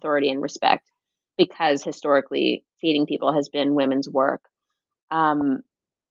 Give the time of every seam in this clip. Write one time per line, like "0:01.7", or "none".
none